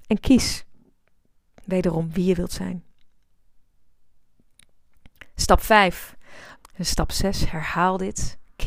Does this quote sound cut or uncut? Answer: cut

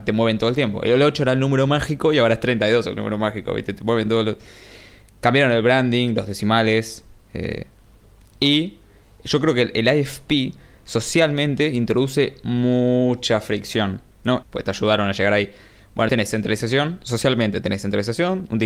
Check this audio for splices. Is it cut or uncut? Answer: cut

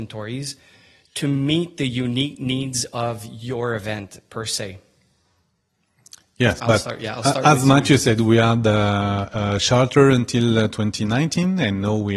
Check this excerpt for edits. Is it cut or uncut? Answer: uncut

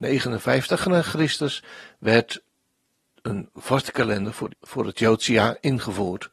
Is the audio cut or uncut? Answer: cut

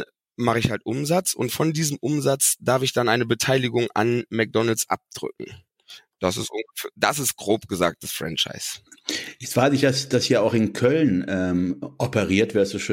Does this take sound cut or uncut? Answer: uncut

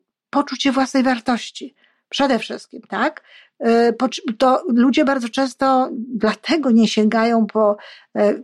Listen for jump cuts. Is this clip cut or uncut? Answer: uncut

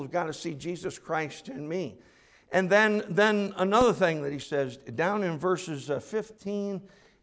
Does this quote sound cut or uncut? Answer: uncut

